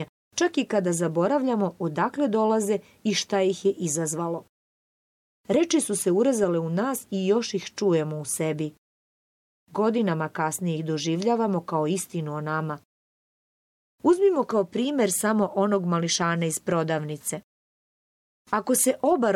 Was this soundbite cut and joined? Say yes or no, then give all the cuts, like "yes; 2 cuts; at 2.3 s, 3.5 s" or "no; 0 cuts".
no; 0 cuts